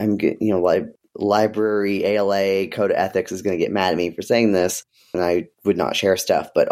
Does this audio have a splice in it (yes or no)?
yes